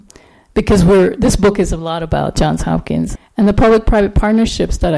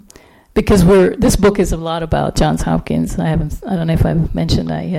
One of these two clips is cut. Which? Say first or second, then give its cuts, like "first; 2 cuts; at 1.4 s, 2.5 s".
first; 1 cut; at 3.2 s